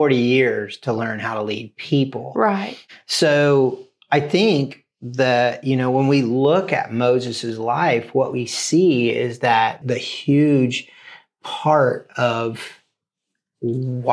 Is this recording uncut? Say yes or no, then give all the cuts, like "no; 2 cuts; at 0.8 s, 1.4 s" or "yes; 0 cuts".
no; 1 cut; at 9.8 s